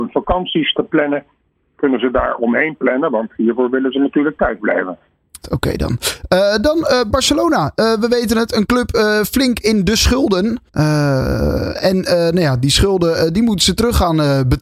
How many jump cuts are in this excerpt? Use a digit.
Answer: 2